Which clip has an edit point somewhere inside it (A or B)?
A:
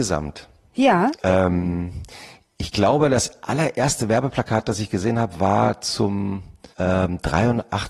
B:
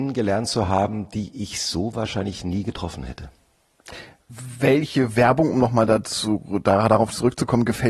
A